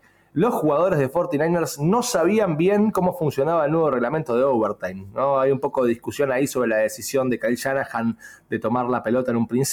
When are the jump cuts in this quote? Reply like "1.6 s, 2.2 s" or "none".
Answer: none